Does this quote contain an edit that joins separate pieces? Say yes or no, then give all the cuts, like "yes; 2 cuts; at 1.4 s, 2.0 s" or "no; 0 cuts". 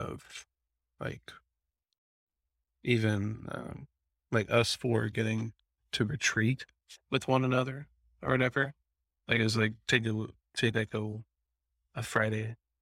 no; 0 cuts